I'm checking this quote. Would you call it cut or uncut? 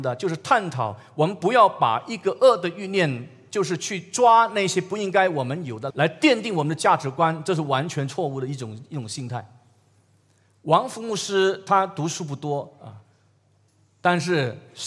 cut